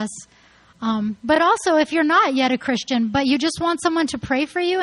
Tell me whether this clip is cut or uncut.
uncut